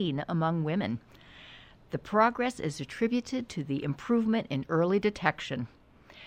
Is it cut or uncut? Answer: uncut